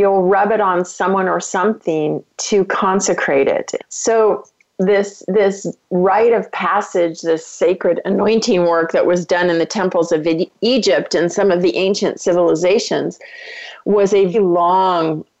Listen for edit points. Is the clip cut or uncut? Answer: cut